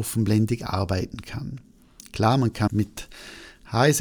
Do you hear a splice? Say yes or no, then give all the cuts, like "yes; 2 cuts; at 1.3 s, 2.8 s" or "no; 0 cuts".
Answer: yes; 1 cut; at 2.7 s